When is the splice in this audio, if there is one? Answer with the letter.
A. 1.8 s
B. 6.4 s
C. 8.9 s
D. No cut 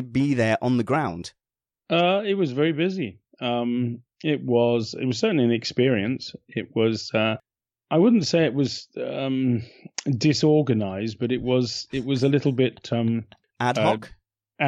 D